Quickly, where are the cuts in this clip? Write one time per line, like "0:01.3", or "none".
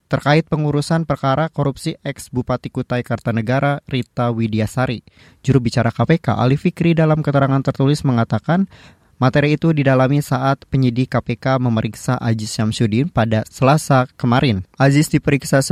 none